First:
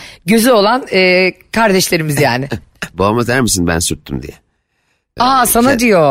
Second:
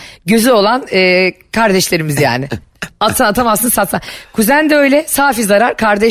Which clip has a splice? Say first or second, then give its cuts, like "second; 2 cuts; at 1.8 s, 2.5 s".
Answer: first; 2 cuts; at 2.9 s, 5.2 s